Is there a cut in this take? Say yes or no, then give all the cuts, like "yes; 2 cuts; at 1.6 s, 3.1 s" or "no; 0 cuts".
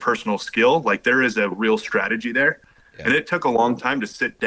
no; 0 cuts